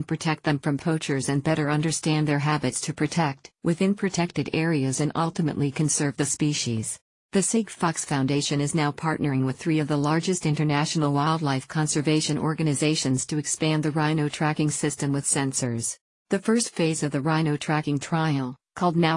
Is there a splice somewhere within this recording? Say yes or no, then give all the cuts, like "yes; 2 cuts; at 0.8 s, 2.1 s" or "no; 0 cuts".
yes; 1 cut; at 3.5 s